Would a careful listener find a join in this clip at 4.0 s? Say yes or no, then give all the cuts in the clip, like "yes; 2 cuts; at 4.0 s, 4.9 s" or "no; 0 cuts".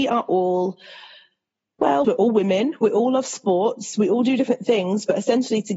no; 1 cut; at 2.0 s